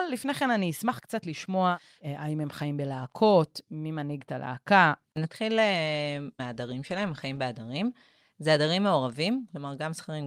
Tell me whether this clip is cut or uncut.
uncut